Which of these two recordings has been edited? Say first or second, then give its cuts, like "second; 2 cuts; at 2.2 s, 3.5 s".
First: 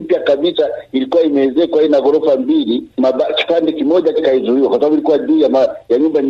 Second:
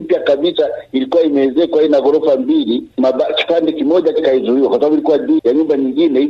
second; 1 cut; at 5.4 s